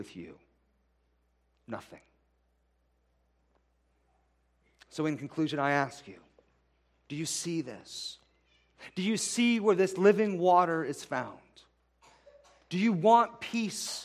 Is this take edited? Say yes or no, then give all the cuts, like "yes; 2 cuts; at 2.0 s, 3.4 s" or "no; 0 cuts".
no; 0 cuts